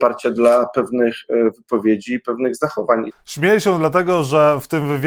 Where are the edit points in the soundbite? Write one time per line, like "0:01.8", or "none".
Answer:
0:03.1